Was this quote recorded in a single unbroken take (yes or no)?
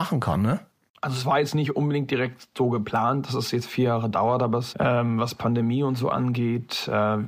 no